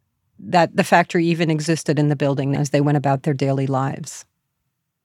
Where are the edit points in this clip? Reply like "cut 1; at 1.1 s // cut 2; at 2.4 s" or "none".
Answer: cut 1; at 2.5 s